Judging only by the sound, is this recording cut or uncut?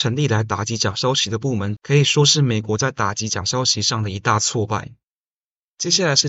cut